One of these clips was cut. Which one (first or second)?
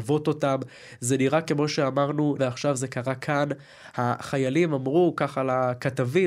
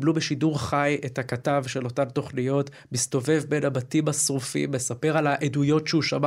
first